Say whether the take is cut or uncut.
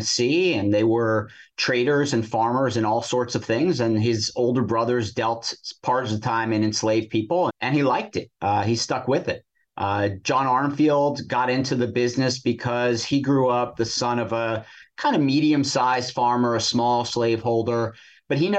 cut